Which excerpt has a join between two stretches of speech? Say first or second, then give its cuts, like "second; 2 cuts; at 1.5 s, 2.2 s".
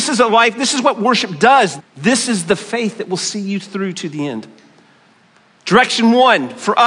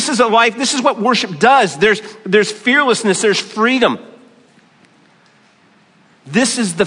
first; 1 cut; at 1.8 s